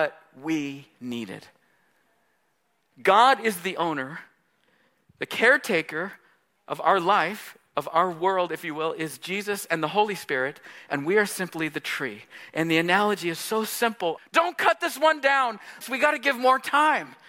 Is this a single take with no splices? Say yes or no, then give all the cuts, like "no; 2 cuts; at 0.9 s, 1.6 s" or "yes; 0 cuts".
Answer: no; 2 cuts; at 14.2 s, 15.8 s